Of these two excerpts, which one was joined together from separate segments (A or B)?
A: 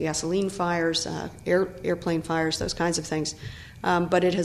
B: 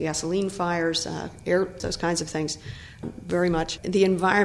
B